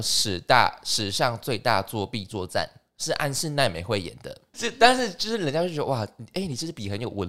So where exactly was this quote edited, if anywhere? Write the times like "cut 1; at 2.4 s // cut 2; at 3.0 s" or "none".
cut 1; at 4.5 s

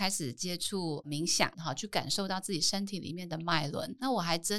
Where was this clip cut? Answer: cut 1; at 1.5 s

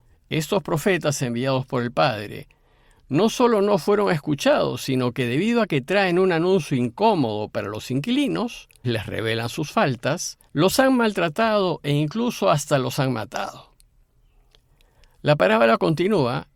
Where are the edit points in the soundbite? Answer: cut 1; at 8.8 s // cut 2; at 10.5 s

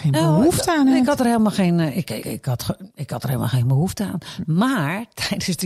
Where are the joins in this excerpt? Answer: cut 1; at 2.2 s

